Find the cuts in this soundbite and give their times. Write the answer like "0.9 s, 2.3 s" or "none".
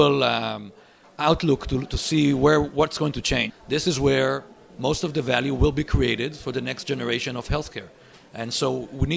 3.5 s